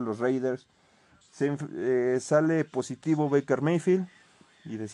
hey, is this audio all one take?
no; 1 cut; at 1.2 s

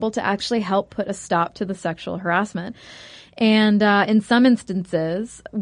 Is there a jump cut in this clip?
no; 0 cuts

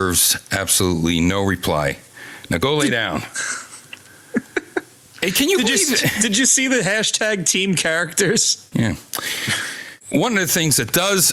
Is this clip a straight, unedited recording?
no; 1 cut; at 8.7 s

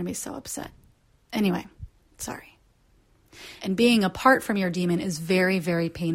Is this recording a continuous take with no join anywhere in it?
no; 1 cut; at 3.6 s

